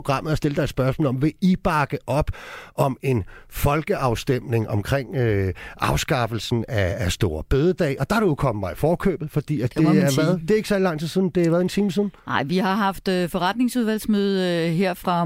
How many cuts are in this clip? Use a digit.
0